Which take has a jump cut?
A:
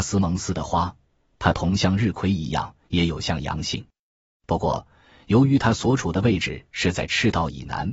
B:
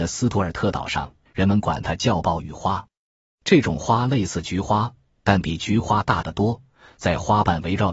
B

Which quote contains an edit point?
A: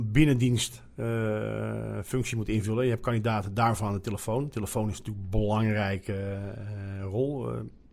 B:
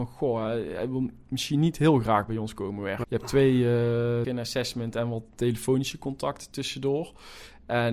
B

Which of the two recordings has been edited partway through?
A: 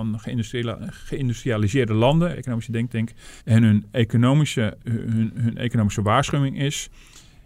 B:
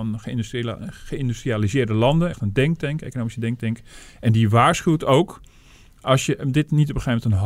A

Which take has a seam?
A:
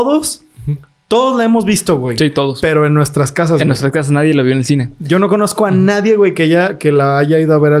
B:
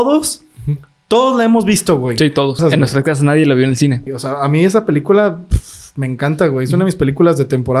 B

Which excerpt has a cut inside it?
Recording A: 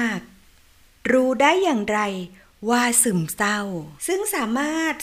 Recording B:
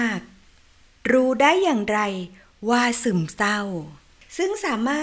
A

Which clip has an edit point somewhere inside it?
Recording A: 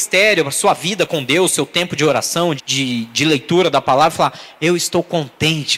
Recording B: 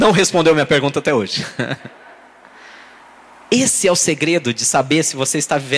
A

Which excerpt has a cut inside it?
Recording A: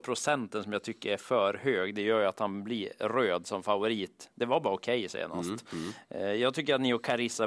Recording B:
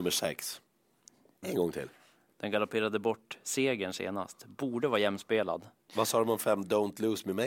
B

